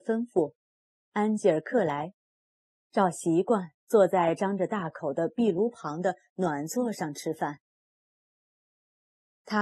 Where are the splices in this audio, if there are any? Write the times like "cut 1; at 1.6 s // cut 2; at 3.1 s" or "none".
none